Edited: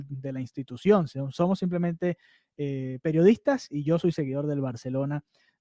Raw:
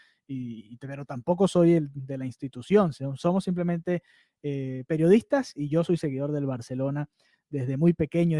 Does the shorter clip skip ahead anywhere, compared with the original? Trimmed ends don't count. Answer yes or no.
no